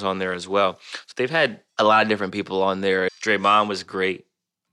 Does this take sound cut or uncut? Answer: cut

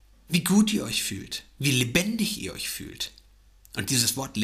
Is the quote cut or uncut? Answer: uncut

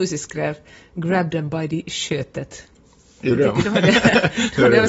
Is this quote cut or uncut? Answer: uncut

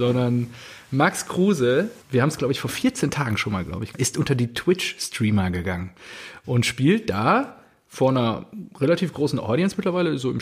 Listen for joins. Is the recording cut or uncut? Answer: cut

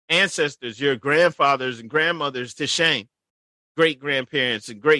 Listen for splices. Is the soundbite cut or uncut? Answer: uncut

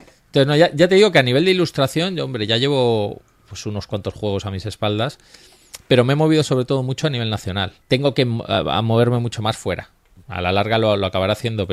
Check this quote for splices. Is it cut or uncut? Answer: cut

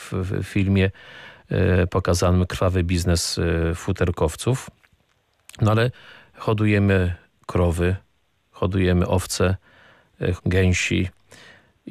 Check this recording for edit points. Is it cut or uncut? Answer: cut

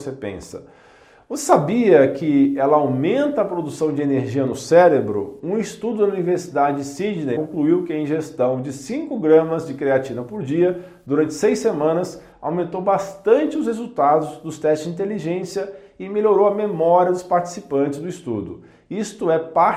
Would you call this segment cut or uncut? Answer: cut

